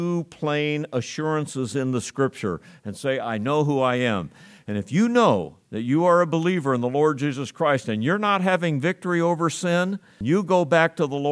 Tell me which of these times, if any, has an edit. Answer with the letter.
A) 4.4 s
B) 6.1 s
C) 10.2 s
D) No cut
C